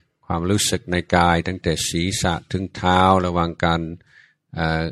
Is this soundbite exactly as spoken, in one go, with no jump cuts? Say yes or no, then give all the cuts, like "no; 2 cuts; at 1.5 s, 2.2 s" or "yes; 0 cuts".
yes; 0 cuts